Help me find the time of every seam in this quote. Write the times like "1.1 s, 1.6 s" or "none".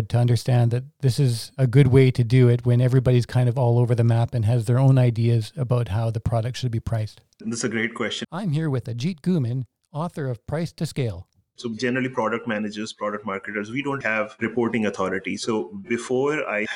8.2 s, 11.6 s, 14.0 s